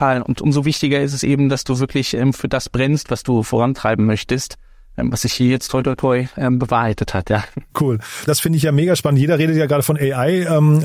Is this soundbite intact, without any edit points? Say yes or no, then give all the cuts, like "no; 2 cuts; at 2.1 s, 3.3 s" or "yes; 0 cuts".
no; 1 cut; at 8.3 s